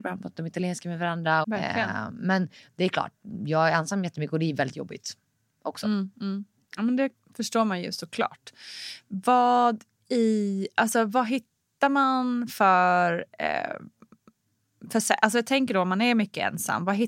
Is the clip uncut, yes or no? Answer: no